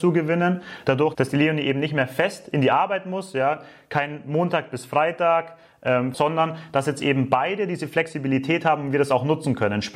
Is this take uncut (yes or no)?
no